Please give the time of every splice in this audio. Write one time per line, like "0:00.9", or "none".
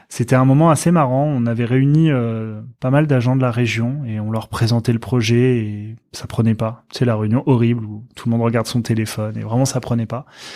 none